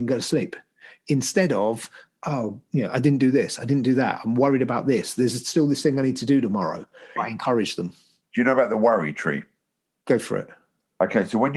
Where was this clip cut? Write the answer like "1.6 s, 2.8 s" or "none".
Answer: 7.2 s